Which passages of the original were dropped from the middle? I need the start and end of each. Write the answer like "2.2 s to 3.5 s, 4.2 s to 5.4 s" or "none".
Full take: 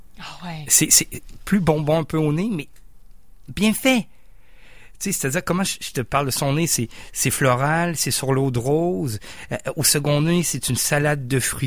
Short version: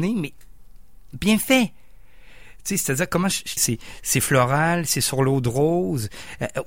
5.9 s to 6.7 s